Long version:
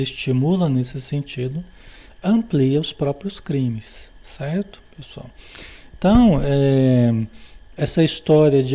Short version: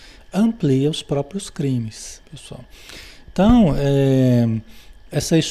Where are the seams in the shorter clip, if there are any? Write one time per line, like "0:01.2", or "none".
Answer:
0:02.2